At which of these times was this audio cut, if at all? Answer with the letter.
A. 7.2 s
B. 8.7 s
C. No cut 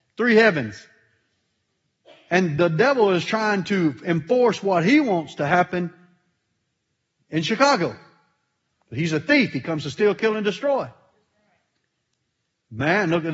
B